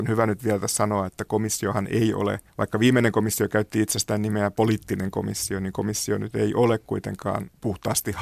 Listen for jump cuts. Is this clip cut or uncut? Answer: cut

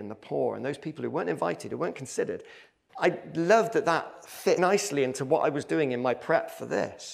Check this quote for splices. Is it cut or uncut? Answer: cut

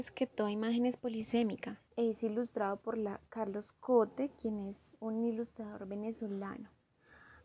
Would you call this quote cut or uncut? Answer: cut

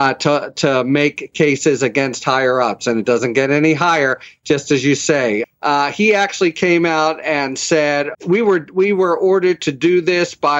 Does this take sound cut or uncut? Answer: cut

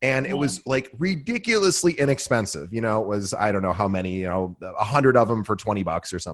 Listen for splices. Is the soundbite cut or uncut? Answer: uncut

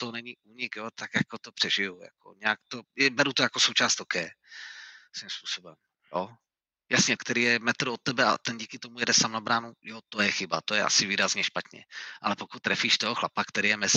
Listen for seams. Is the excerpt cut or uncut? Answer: cut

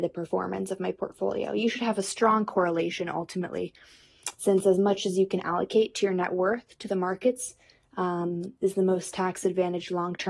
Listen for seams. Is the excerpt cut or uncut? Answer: uncut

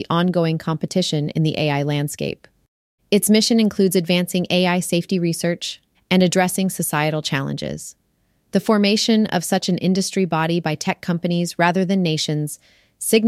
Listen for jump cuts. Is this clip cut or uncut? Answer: cut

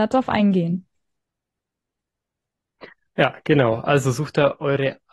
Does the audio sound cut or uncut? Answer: uncut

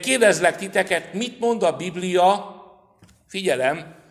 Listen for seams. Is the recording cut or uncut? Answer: uncut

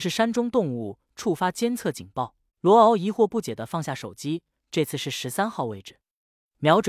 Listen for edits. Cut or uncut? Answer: cut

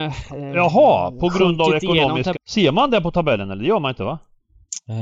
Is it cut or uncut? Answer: cut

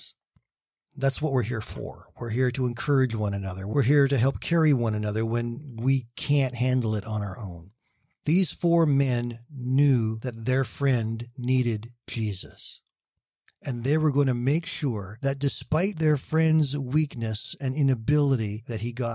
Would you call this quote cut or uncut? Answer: uncut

